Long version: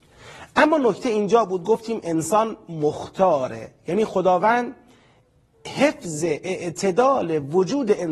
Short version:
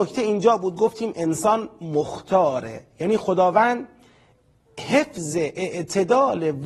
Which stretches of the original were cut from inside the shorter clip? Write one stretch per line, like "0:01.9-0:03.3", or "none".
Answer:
none